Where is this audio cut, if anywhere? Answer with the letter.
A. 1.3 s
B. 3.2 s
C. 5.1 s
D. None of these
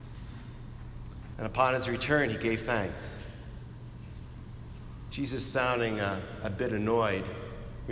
A